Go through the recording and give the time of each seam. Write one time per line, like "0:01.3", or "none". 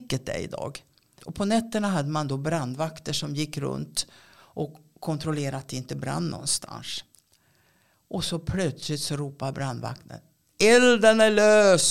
0:01.2

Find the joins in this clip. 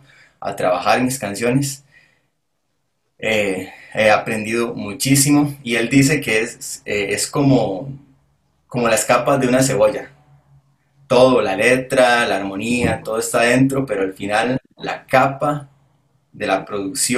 none

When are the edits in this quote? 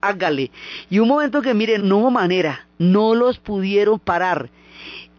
0:01.8

